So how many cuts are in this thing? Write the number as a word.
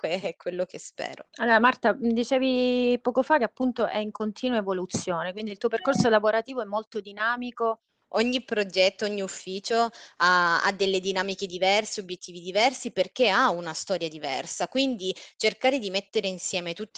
two